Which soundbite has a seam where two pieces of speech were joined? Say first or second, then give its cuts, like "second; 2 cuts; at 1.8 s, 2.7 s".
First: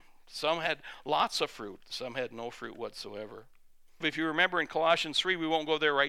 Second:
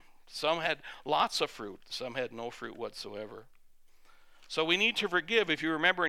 first; 1 cut; at 4.0 s